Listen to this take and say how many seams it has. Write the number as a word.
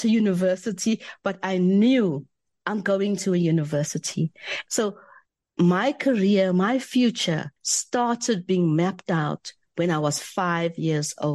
two